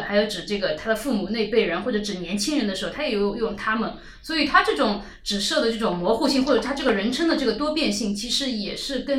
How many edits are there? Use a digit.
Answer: 0